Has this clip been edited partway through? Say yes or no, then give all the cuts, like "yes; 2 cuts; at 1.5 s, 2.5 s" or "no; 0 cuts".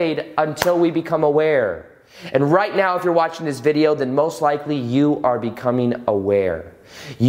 no; 0 cuts